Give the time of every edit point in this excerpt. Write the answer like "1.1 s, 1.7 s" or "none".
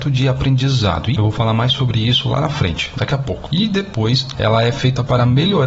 1.1 s, 4.3 s